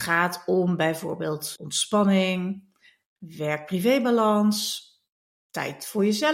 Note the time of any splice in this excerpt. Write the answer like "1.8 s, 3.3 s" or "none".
1.6 s